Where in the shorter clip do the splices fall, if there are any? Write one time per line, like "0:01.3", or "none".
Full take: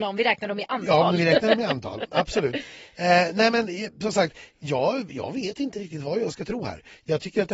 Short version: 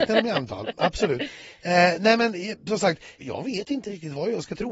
0:03.2